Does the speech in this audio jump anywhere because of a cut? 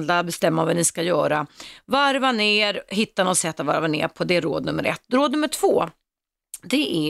no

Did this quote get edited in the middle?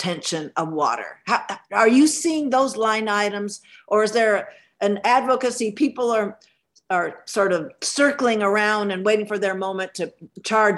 no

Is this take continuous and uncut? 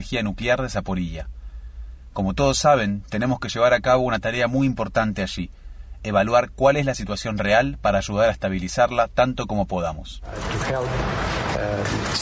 yes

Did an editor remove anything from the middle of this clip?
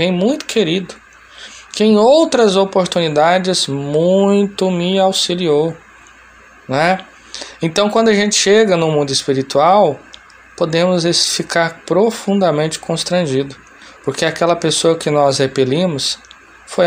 no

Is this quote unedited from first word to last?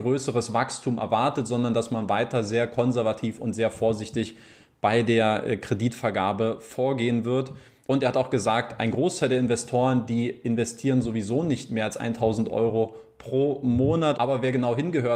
no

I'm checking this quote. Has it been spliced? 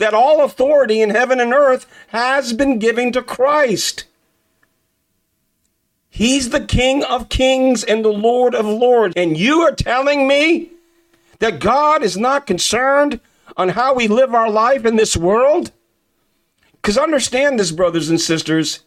yes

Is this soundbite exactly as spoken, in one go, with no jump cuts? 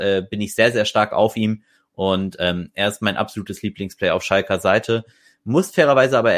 yes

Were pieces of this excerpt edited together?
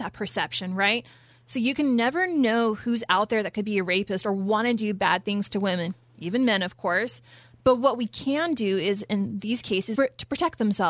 yes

